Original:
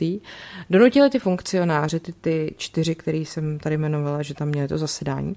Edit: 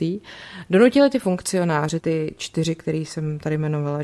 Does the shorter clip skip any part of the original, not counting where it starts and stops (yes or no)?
yes